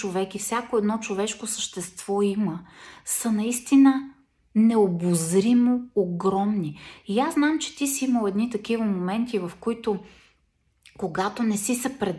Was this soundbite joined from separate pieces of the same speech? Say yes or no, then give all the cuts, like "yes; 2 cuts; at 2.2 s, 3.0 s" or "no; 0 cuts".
no; 0 cuts